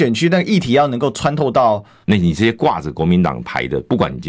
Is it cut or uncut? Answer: cut